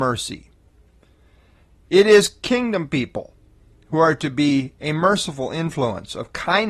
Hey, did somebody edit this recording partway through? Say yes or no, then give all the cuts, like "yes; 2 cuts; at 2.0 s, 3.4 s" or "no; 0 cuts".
no; 0 cuts